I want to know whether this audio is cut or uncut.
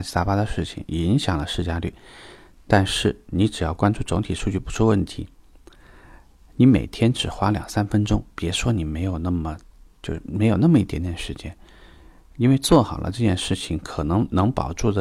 uncut